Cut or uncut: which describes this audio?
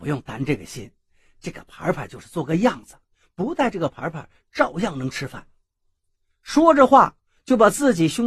uncut